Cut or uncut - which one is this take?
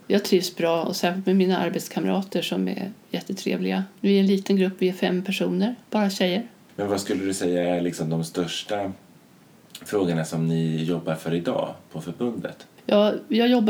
uncut